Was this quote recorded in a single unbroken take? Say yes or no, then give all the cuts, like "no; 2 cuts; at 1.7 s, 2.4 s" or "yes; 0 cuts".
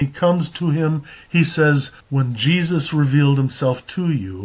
no; 1 cut; at 2.0 s